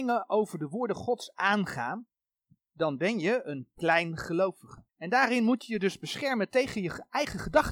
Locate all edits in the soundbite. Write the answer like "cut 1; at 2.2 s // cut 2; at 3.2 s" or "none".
cut 1; at 2.6 s // cut 2; at 4.9 s

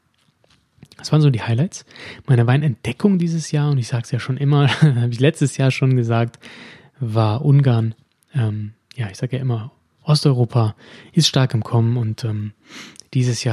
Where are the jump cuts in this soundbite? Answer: none

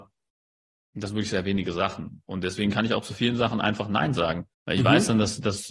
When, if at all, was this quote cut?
cut 1; at 4.5 s

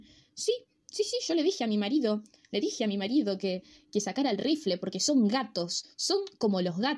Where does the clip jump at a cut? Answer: none

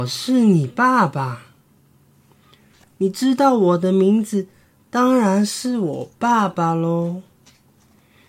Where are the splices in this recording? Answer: cut 1; at 2.8 s

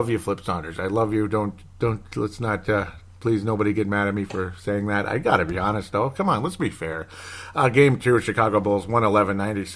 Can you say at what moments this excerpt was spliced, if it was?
none

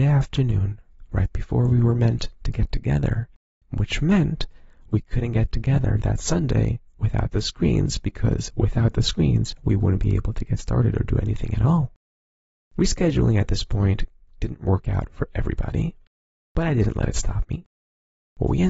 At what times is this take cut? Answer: cut 1; at 3.6 s

